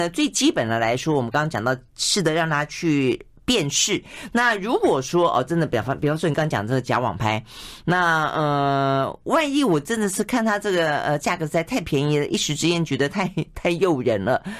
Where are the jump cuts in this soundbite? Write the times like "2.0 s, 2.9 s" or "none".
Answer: none

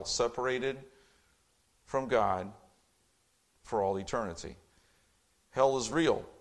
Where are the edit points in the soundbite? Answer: none

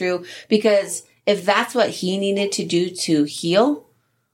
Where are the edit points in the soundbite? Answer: none

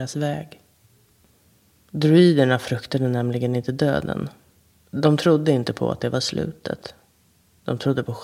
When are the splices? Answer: none

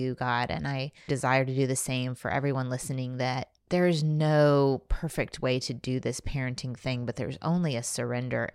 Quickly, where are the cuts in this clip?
1.1 s, 3.6 s

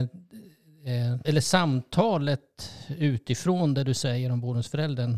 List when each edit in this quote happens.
1.2 s

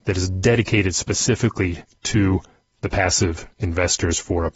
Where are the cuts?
none

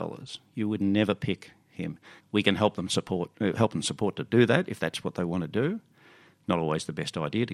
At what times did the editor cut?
2.2 s

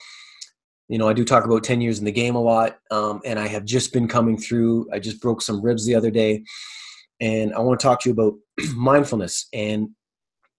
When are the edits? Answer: none

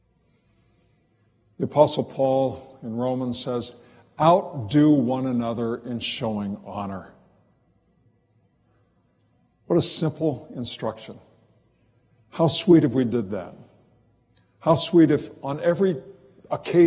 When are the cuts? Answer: none

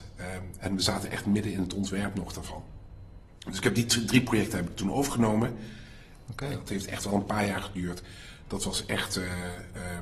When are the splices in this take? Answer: 6.3 s

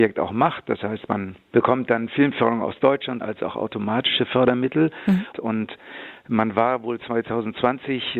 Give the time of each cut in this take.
3.2 s, 5.3 s

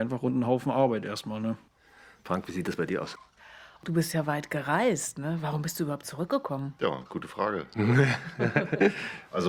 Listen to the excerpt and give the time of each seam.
none

